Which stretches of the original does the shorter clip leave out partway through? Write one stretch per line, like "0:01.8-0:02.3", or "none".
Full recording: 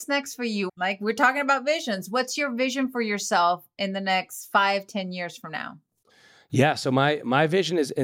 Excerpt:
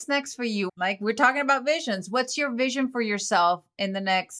none